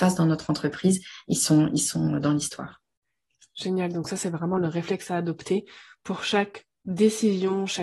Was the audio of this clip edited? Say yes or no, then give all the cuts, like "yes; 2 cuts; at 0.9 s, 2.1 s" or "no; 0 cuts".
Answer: no; 0 cuts